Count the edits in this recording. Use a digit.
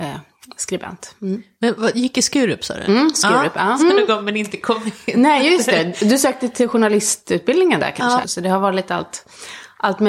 2